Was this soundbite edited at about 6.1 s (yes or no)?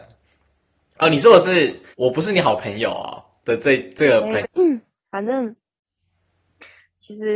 no